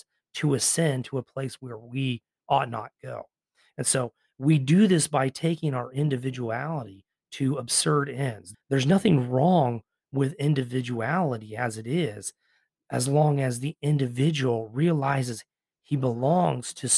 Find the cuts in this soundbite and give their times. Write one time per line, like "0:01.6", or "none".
0:08.5